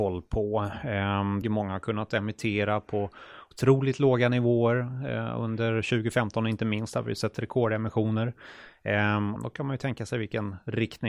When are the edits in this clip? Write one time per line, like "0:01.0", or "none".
0:01.4
0:09.4